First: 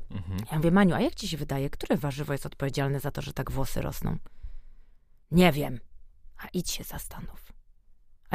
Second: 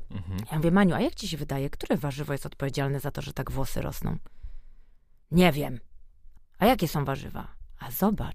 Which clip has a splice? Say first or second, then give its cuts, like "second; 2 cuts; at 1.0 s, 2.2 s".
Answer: second; 1 cut; at 6.4 s